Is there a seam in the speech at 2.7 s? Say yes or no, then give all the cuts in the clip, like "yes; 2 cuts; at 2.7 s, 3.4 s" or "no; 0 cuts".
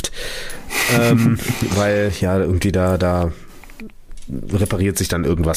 no; 0 cuts